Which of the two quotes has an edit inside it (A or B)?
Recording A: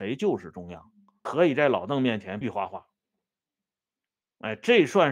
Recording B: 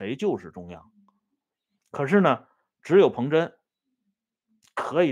A